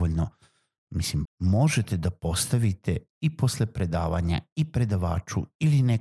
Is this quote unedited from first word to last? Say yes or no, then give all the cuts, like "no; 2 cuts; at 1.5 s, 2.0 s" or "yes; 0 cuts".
no; 2 cuts; at 1.3 s, 3.1 s